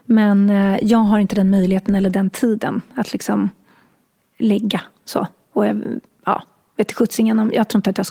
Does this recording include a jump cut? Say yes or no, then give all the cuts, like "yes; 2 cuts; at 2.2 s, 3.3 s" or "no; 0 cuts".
no; 0 cuts